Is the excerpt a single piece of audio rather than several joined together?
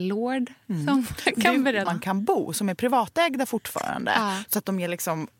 no; 1 cut; at 1.9 s

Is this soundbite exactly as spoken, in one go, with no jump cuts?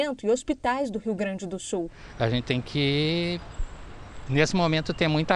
yes; 0 cuts

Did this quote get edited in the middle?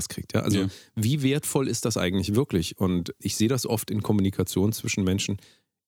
yes; 1 cut; at 3.2 s

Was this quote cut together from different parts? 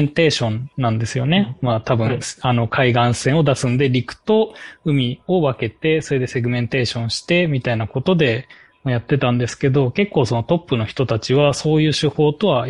no; 0 cuts

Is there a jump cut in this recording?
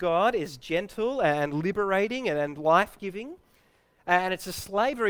no; 0 cuts

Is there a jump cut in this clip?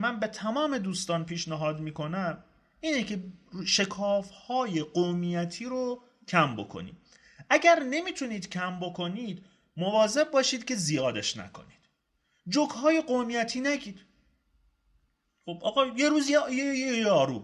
no; 0 cuts

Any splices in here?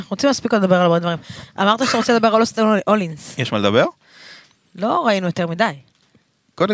no; 0 cuts

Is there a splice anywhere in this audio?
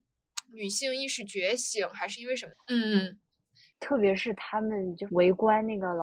yes; 1 cut; at 2.5 s

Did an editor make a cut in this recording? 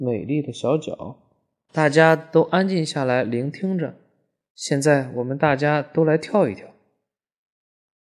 yes; 2 cuts; at 1.7 s, 4.5 s

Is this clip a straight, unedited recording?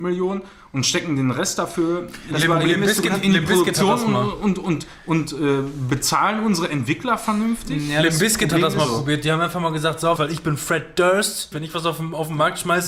no; 2 cuts; at 10.2 s, 11.5 s

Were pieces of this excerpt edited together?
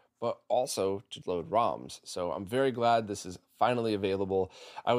yes; 1 cut; at 1.2 s

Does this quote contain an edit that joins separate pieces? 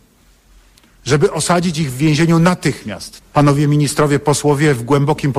yes; 1 cut; at 3.2 s

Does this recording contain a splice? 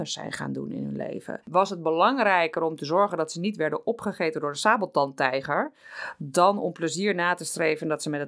yes; 1 cut; at 1.4 s

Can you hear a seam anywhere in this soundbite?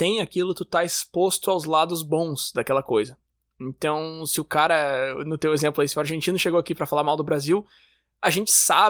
no; 0 cuts

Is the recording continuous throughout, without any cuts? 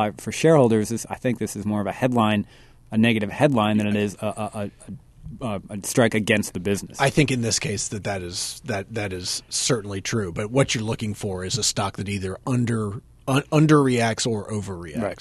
yes; 0 cuts

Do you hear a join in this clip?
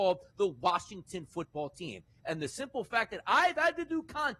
no; 0 cuts

